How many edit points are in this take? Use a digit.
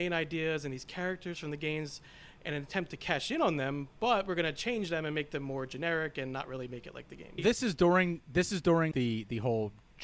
2